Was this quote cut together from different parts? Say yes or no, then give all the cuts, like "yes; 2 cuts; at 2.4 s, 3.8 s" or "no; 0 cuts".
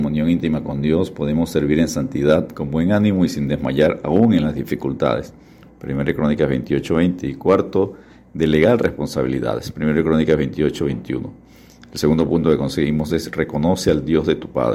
yes; 1 cut; at 5.7 s